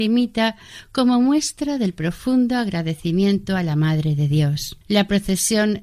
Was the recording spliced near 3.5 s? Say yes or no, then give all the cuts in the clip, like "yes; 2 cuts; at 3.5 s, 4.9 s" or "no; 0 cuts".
no; 1 cut; at 4.8 s